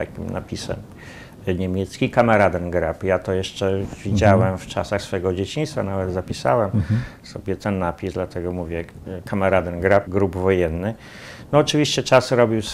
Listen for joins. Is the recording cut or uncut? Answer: cut